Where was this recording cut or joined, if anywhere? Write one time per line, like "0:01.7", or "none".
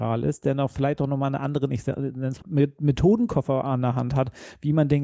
0:02.4